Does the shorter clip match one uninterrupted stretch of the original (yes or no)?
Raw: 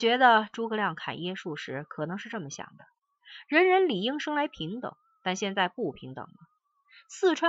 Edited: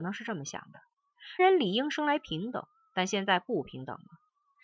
no